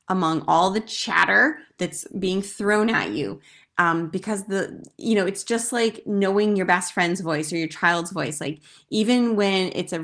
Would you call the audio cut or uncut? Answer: uncut